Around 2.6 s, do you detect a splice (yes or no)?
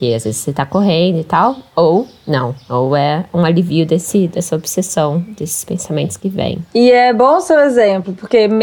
no